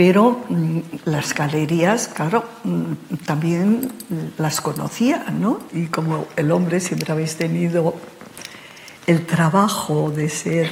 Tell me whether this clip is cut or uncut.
cut